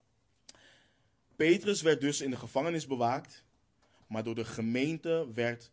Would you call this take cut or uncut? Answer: uncut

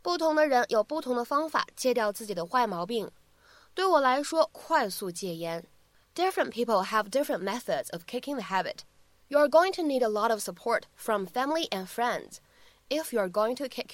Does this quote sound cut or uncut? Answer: cut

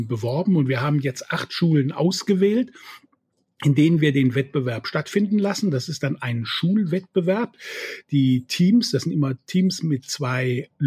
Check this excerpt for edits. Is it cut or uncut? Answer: uncut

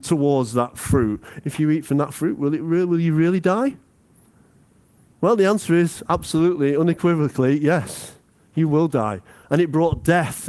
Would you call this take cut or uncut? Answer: cut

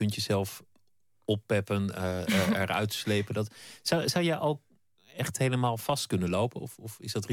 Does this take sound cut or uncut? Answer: uncut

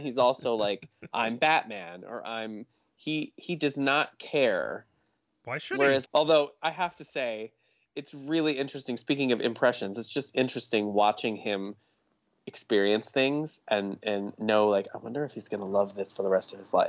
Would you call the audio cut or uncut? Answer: cut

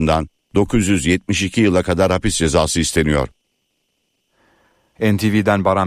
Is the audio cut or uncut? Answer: cut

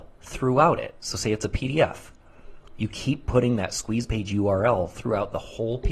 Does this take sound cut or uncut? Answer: uncut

